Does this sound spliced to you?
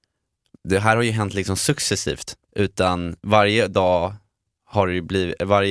yes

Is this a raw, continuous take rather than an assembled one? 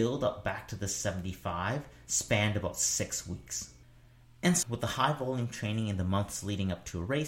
no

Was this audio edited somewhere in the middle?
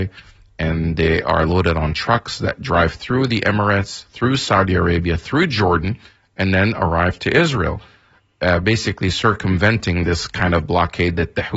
no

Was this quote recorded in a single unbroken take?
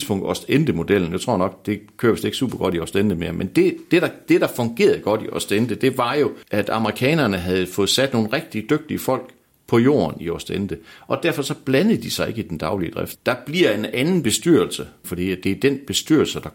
no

